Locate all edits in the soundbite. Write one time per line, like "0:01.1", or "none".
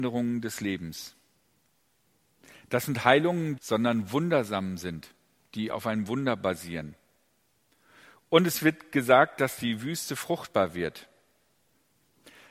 0:03.6